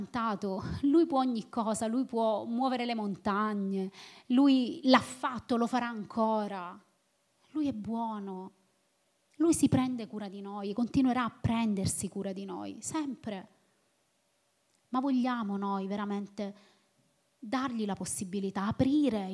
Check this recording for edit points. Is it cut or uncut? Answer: uncut